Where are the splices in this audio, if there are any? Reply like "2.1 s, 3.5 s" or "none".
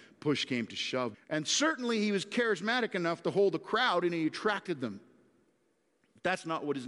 1.1 s